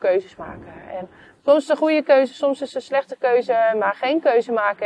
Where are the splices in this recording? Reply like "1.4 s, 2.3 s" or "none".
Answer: none